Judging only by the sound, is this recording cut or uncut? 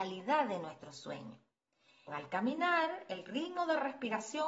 cut